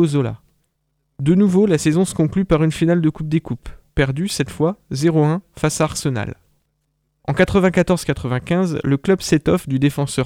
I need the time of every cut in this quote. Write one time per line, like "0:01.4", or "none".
none